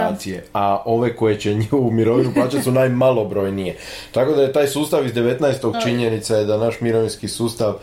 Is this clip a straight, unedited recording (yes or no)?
no